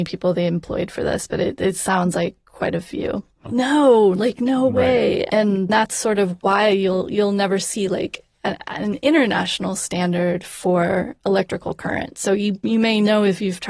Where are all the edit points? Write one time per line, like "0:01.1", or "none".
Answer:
0:03.4